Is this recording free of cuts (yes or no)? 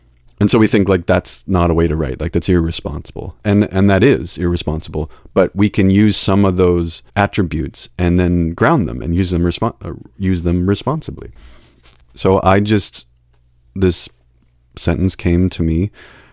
no